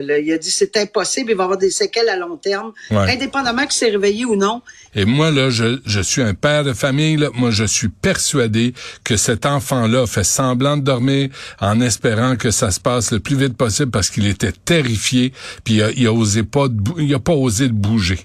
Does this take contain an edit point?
yes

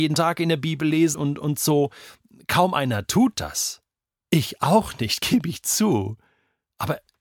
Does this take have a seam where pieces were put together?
yes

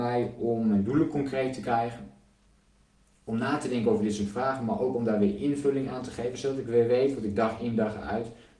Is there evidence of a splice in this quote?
no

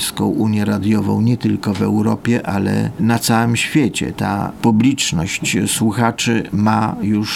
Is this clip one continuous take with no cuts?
yes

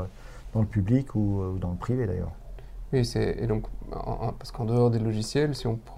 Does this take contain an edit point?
no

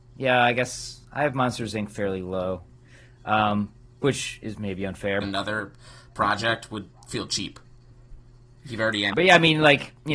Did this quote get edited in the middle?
yes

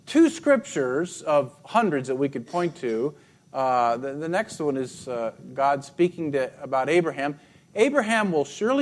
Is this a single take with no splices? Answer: yes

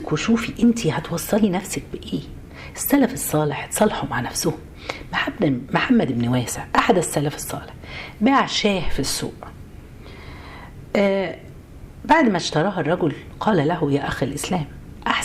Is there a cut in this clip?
no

